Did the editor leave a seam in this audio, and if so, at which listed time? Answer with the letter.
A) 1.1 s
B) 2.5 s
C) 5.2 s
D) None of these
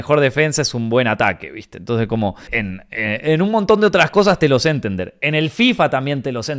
B